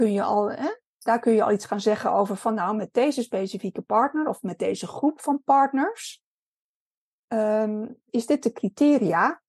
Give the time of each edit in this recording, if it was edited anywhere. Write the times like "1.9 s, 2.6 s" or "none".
8.1 s